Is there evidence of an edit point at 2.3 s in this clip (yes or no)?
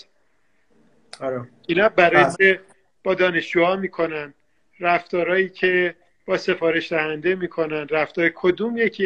yes